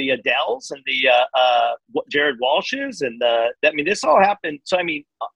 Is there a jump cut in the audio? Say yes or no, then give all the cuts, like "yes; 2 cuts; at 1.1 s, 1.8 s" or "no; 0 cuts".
no; 0 cuts